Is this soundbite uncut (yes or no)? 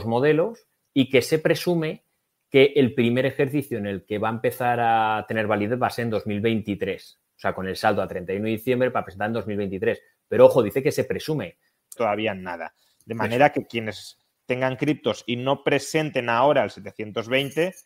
no